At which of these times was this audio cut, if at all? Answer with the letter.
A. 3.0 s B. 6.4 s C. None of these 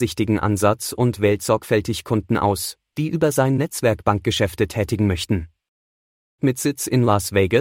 B